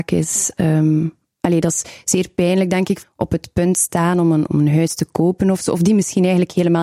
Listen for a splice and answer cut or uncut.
cut